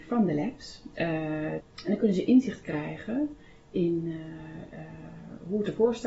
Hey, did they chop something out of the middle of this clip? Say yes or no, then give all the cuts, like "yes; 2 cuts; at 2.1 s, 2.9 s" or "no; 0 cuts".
yes; 1 cut; at 1.6 s